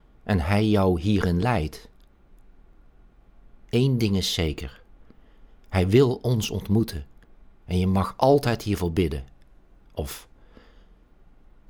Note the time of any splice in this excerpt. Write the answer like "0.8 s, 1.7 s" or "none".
9.8 s